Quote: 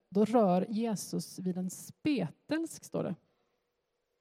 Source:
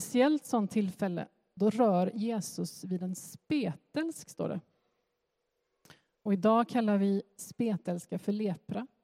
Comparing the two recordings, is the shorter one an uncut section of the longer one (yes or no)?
yes